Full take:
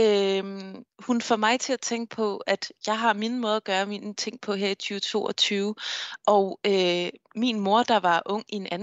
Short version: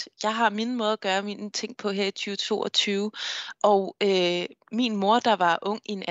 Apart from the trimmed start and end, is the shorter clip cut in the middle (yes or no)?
no